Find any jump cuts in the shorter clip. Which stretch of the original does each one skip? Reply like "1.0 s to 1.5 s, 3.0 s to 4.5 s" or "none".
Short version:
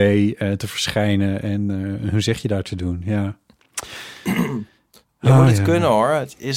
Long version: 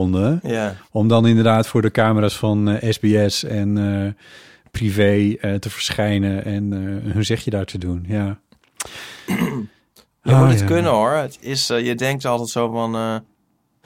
none